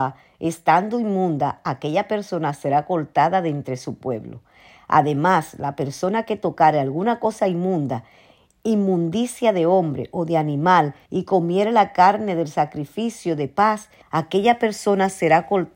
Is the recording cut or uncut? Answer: cut